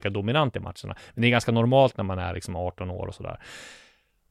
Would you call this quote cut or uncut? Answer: uncut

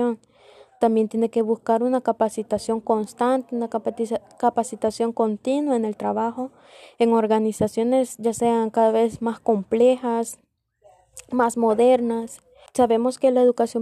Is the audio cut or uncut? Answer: cut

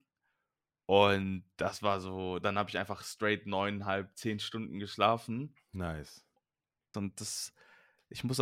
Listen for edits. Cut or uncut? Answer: cut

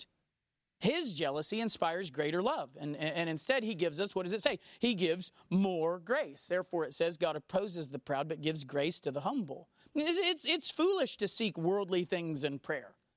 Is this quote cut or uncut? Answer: uncut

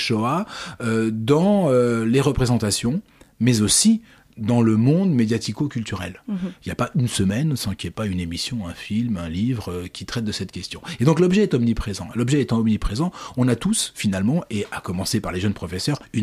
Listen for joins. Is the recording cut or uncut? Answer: uncut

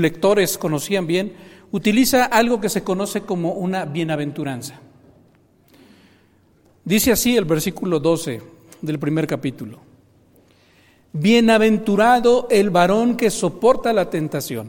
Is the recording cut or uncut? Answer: uncut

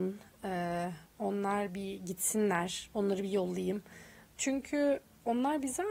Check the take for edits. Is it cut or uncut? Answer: cut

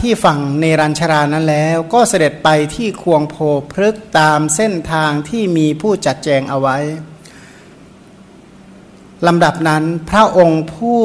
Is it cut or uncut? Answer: uncut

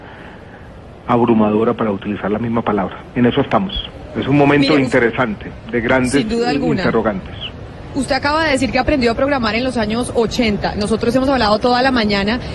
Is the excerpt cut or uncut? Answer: uncut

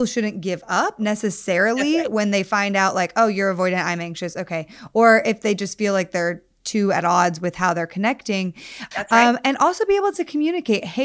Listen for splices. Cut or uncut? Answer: cut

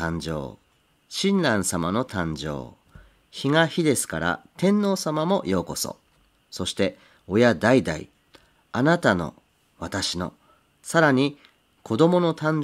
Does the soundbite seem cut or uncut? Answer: uncut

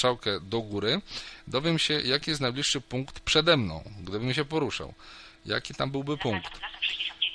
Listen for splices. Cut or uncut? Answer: uncut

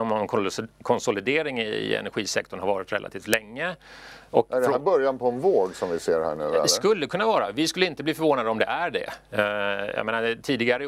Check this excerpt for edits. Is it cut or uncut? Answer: uncut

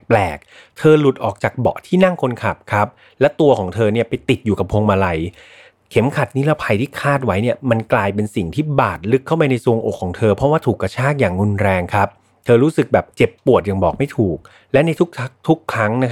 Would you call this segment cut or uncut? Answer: cut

